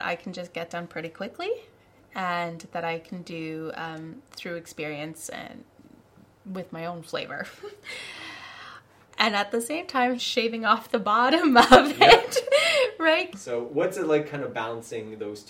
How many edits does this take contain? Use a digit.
2